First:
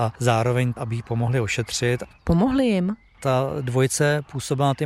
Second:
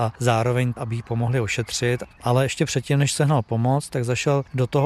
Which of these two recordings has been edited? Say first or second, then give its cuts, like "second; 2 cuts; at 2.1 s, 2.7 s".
second; 1 cut; at 2.2 s